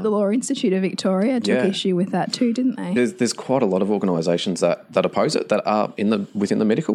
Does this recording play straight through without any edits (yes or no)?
no